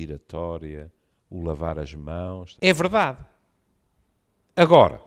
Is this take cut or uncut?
cut